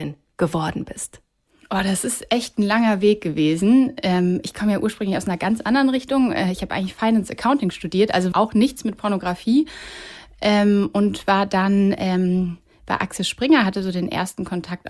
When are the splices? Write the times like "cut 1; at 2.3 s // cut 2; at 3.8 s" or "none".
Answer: cut 1; at 8.3 s